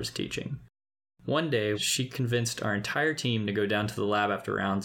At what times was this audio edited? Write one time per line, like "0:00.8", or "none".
0:01.7